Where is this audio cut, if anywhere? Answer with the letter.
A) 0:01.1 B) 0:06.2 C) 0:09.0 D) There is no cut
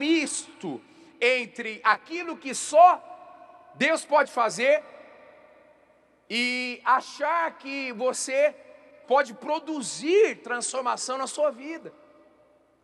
C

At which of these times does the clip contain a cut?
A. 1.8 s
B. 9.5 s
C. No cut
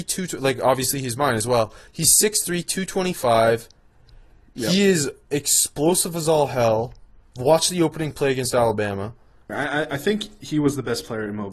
B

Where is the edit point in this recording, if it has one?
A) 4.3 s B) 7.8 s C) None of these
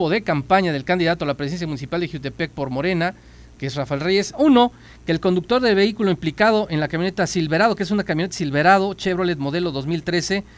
A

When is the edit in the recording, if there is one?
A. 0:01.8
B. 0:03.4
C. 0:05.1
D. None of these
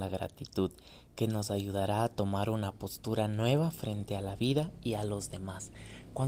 D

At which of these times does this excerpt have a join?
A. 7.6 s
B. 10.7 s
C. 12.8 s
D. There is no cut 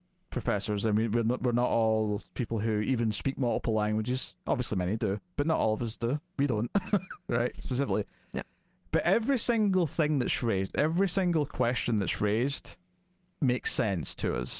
D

